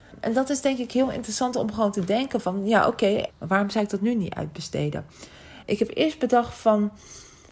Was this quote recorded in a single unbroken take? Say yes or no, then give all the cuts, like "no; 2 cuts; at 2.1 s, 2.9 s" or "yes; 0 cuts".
no; 2 cuts; at 3.3 s, 5.6 s